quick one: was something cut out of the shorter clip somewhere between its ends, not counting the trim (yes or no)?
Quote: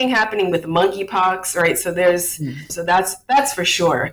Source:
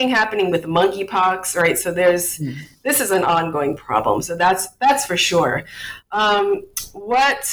yes